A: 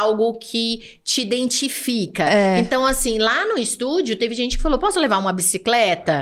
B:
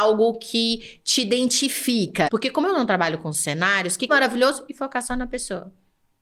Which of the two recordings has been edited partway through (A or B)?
B